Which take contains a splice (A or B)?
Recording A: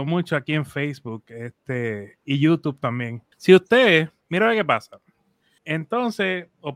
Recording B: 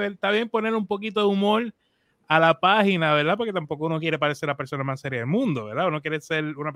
A